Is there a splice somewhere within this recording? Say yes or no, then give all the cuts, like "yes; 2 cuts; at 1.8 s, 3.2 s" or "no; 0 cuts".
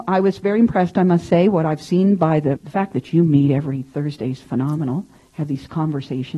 yes; 1 cut; at 2.6 s